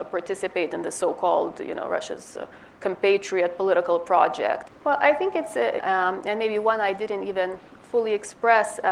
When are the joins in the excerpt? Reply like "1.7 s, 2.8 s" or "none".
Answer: 4.7 s, 5.8 s